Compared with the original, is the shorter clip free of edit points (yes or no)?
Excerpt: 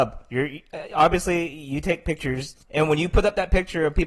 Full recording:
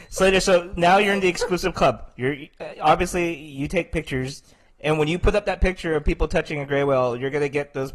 no